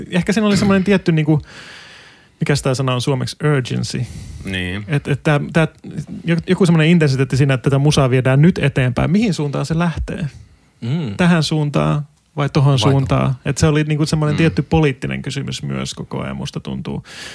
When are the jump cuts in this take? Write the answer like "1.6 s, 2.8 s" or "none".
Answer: none